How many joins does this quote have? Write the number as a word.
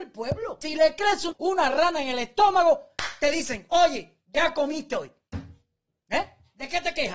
zero